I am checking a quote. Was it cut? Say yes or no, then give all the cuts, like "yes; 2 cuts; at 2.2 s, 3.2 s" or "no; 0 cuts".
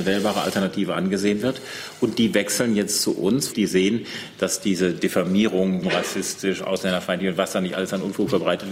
yes; 2 cuts; at 3.5 s, 5.8 s